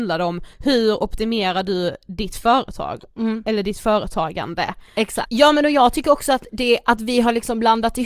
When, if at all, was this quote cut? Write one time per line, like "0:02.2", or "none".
0:05.3